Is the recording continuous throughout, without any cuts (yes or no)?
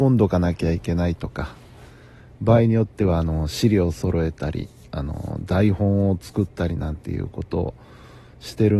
yes